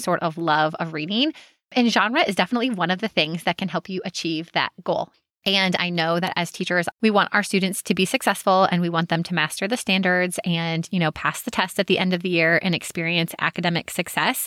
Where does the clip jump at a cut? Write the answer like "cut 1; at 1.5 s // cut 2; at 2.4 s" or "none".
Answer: cut 1; at 5.3 s // cut 2; at 6.9 s